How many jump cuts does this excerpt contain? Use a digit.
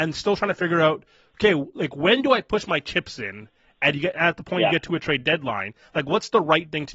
0